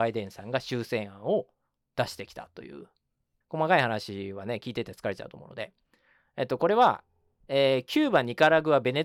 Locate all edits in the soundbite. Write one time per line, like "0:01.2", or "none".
0:03.4